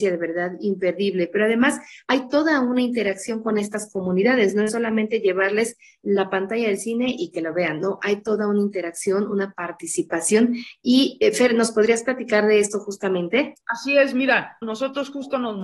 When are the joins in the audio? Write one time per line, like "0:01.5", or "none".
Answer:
0:13.6